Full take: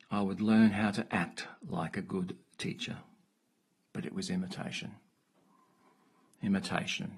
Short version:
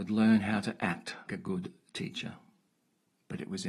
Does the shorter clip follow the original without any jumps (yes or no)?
no